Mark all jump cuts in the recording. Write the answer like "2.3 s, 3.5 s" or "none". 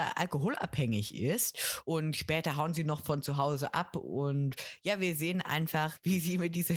1.8 s